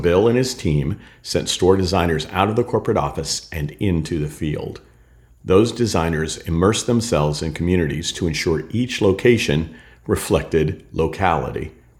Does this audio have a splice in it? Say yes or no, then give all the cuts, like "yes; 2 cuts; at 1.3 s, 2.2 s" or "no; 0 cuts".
no; 0 cuts